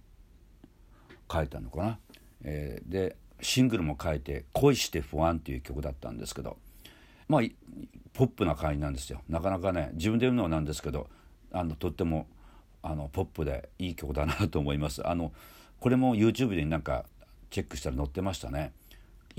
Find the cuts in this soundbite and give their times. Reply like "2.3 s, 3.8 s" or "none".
7.2 s